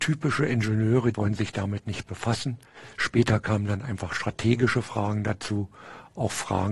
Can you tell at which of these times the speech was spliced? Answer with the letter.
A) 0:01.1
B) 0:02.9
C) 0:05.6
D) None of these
A